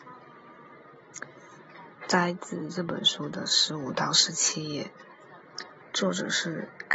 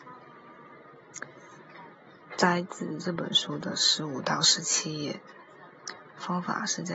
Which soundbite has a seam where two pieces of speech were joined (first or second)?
first